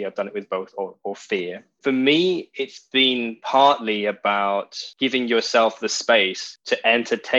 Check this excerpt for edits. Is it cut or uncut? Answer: cut